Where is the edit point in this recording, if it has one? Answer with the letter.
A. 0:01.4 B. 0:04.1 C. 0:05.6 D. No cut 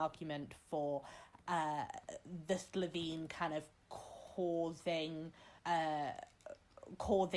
C